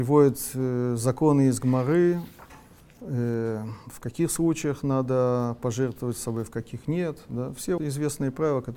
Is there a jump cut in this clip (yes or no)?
yes